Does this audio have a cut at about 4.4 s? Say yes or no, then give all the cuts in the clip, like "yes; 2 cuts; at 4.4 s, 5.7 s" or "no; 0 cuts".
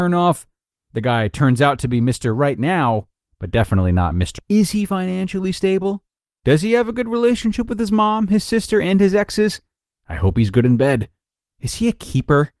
yes; 1 cut; at 4.4 s